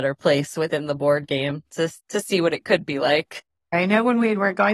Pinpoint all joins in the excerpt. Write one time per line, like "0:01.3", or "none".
0:03.7